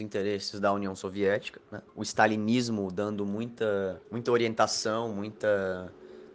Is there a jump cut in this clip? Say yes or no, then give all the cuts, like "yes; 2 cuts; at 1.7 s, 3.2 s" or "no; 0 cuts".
yes; 2 cuts; at 1.9 s, 4.0 s